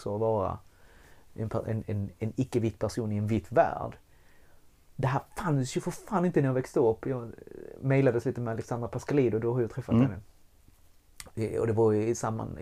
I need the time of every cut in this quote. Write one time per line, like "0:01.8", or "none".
none